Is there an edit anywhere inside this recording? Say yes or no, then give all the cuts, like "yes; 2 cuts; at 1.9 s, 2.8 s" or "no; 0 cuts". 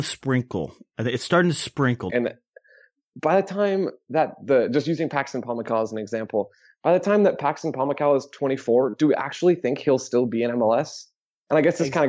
yes; 1 cut; at 2.1 s